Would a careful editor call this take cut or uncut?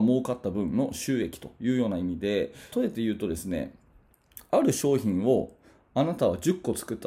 cut